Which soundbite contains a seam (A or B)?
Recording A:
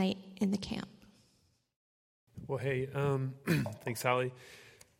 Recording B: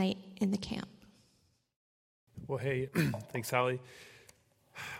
B